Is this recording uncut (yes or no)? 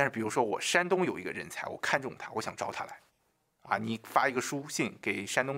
yes